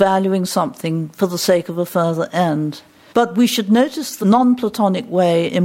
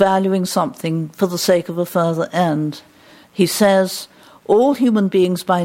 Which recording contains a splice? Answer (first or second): first